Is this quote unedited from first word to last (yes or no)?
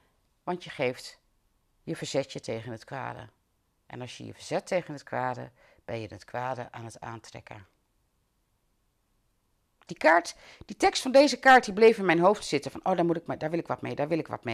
no